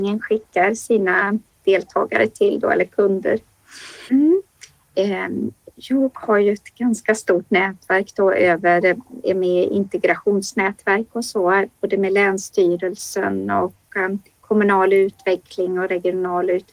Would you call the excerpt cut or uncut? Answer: cut